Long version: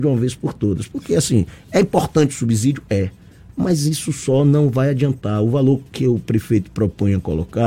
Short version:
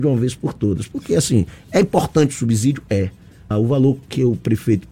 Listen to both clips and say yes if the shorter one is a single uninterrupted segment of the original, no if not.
no